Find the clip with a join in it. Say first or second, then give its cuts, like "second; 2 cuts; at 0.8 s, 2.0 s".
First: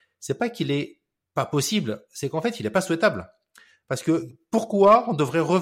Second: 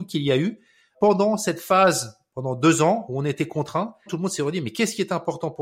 second; 2 cuts; at 0.9 s, 4.1 s